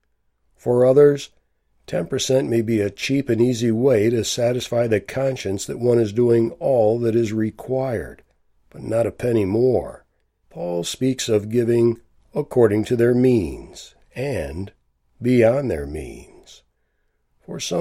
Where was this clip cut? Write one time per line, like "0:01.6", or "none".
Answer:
0:10.4